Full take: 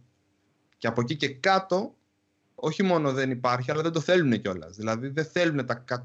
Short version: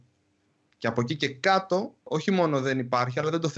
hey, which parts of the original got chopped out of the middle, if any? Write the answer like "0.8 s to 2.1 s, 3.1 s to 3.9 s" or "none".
2.0 s to 2.5 s